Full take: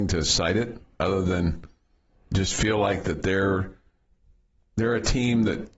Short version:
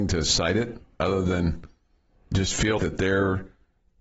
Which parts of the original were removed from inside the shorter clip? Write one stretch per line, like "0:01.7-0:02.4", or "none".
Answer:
0:02.8-0:03.0